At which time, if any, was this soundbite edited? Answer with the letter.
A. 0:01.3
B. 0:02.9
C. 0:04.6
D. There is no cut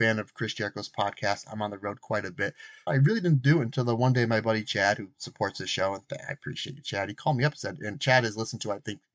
B